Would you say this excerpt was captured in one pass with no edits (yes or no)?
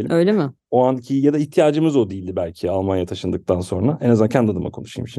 yes